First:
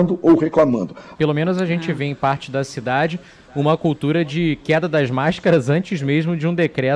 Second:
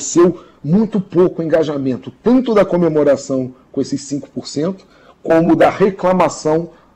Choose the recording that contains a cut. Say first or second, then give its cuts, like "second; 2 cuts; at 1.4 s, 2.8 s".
first; 1 cut; at 1.1 s